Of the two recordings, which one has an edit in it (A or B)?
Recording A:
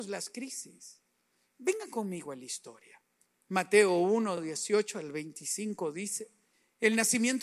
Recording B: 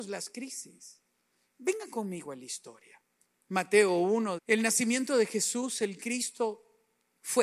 B